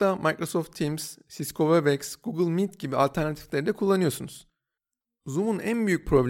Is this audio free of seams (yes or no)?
yes